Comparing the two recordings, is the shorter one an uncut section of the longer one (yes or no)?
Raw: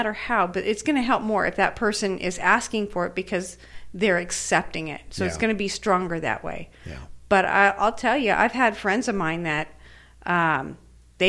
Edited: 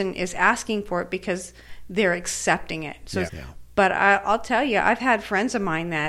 no